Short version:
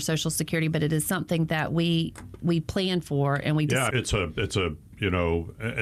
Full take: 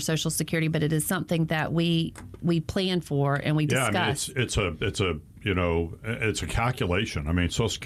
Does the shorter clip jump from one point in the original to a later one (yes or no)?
yes